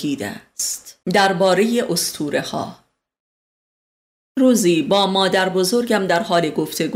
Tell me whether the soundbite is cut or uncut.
cut